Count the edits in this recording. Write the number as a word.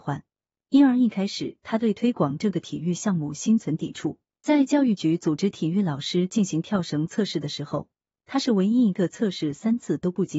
zero